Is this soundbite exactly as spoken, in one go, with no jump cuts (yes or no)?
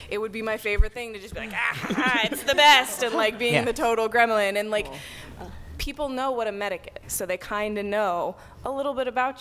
no